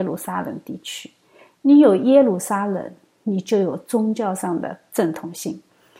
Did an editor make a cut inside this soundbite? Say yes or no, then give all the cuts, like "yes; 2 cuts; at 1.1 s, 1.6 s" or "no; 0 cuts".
no; 0 cuts